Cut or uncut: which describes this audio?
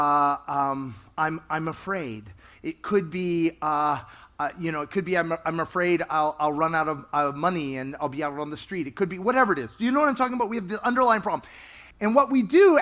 cut